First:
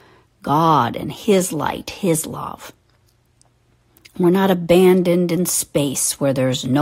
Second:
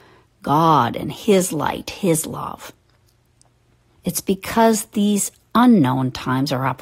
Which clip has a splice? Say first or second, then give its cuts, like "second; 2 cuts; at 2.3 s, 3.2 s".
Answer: second; 1 cut; at 4.0 s